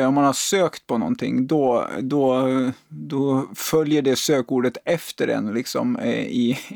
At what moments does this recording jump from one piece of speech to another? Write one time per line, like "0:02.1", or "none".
none